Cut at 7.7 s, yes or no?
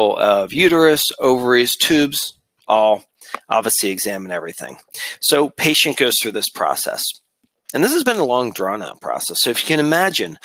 no